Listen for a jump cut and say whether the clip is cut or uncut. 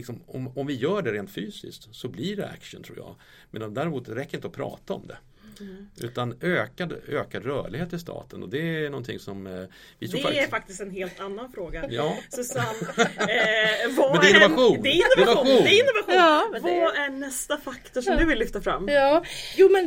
uncut